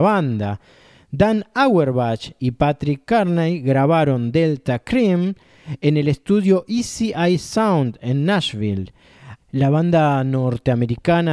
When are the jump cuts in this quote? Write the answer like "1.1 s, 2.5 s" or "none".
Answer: 9.4 s

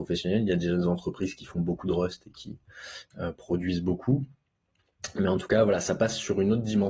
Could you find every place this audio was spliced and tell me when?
none

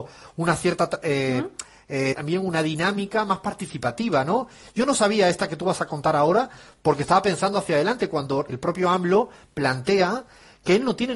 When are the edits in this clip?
2.1 s, 8.5 s

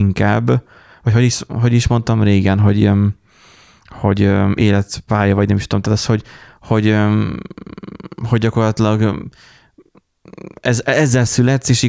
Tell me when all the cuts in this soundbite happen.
none

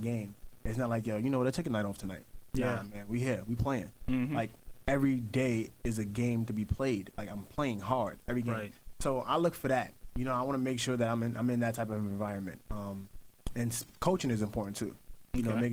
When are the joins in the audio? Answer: none

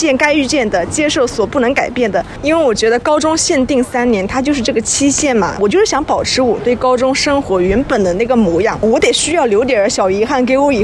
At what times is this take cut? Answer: none

